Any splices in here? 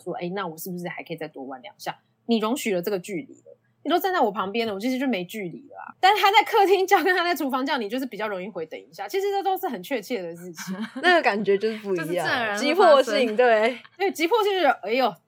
yes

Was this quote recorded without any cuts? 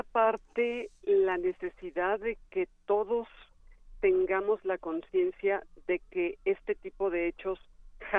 yes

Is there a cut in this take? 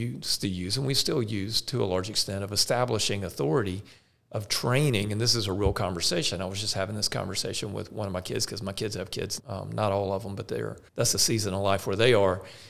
yes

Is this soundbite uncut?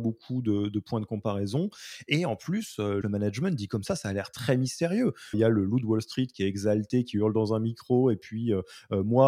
no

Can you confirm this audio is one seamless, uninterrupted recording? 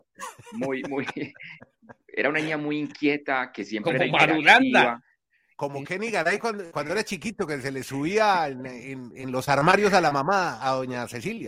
yes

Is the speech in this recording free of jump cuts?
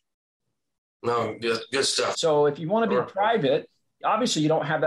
no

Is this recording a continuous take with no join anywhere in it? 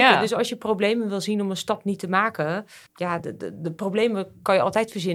yes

